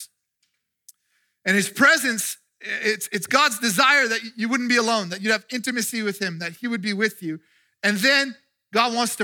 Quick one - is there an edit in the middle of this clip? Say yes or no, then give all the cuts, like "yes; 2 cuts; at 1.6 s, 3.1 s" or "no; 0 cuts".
no; 0 cuts